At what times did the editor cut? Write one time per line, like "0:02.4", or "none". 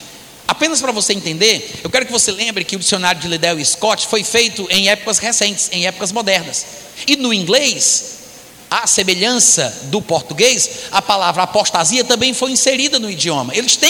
none